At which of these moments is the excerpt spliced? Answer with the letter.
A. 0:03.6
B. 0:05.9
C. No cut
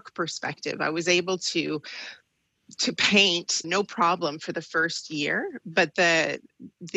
A